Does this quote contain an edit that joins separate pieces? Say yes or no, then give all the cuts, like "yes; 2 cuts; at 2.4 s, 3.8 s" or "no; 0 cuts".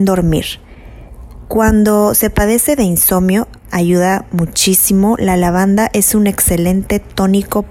no; 0 cuts